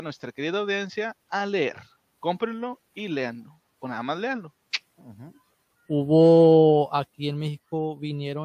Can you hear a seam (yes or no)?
yes